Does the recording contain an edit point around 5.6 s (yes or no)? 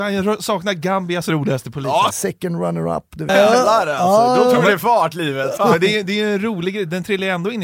yes